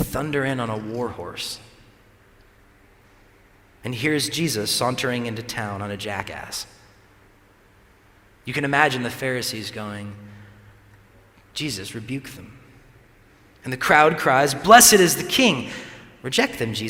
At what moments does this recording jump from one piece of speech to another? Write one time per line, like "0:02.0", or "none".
none